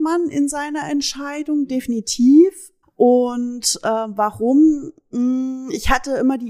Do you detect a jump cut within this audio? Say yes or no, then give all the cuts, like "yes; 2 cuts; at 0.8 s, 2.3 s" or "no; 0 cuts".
yes; 1 cut; at 2.8 s